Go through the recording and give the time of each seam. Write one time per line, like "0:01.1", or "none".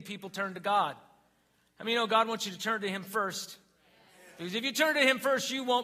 none